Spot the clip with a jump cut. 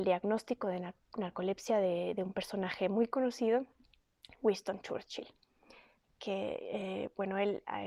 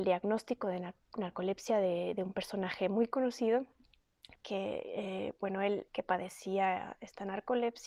second; 2 cuts; at 4.4 s, 5.9 s

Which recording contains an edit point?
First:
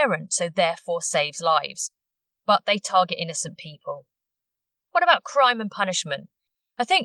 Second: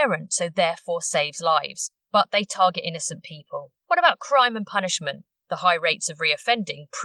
second; 3 cuts; at 2.0 s, 3.8 s, 5.3 s

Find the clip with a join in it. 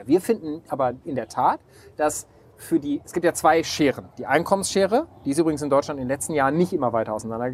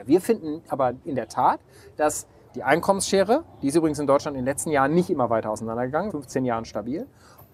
second; 2 cuts; at 2.5 s, 6.1 s

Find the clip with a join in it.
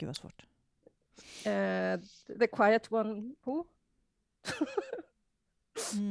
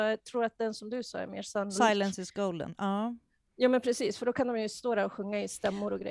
first; 1 cut; at 3.4 s

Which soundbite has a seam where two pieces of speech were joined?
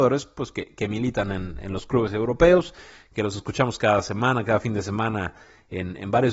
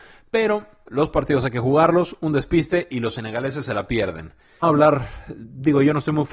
second; 1 cut; at 4.6 s

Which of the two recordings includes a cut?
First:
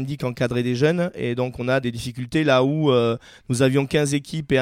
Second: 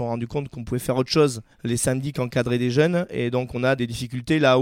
second; 1 cut; at 1.5 s

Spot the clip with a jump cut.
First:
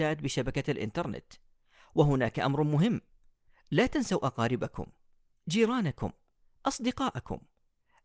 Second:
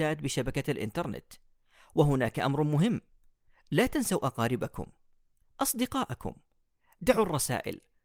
second; 1 cut; at 5.4 s

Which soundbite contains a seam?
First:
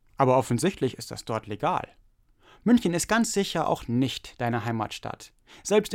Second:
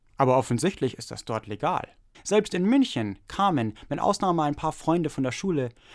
second; 1 cut; at 2.1 s

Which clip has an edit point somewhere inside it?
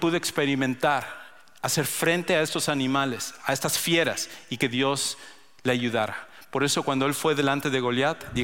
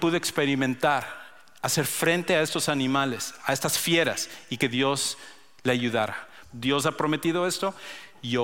second; 1 cut; at 6.4 s

